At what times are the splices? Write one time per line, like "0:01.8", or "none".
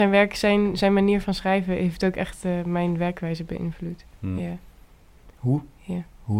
none